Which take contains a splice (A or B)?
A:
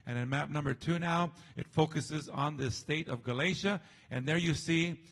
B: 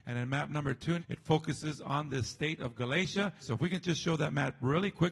B